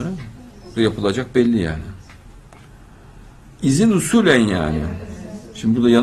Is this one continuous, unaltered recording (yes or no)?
no